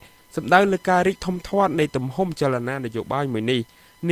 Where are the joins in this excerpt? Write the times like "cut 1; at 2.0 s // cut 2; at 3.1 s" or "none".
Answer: none